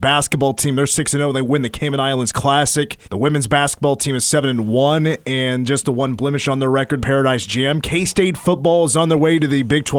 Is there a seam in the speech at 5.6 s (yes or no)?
no